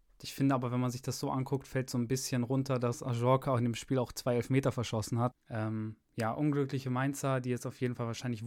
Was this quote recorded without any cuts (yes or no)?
no